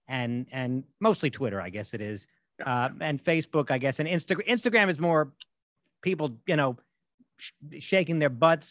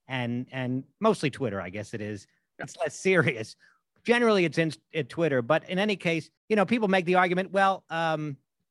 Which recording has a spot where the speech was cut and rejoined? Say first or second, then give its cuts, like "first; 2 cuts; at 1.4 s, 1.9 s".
second; 2 cuts; at 2.6 s, 6.4 s